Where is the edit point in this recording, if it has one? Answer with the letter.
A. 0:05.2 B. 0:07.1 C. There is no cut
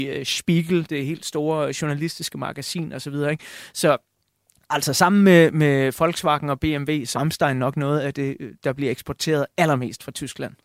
B